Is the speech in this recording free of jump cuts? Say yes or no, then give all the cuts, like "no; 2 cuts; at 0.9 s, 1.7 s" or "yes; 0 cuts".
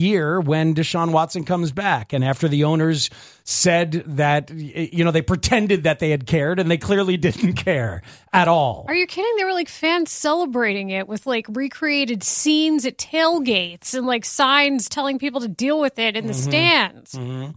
yes; 0 cuts